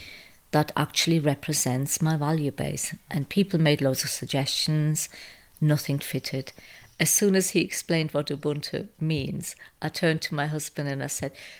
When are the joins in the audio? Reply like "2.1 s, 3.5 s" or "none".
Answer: 6.0 s